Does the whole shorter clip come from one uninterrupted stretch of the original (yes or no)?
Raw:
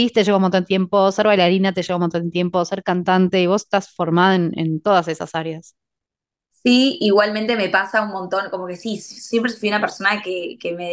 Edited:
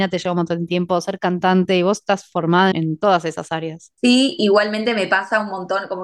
no